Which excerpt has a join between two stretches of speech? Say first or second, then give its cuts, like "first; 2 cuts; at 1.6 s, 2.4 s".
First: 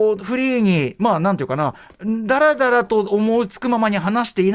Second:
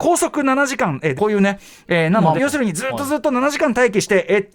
second; 2 cuts; at 1.2 s, 2.4 s